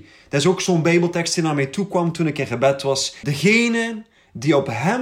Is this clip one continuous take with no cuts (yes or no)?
no